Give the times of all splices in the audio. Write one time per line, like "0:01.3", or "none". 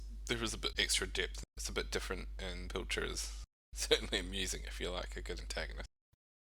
none